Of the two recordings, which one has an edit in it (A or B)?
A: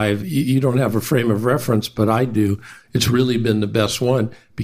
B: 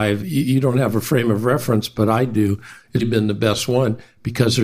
B